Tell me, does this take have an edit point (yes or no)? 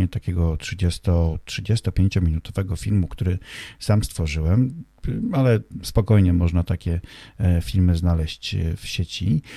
no